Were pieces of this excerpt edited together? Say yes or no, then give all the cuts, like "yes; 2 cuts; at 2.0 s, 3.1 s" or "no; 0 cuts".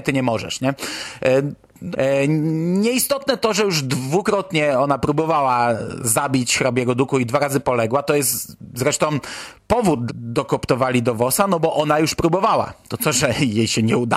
yes; 2 cuts; at 1.9 s, 10.1 s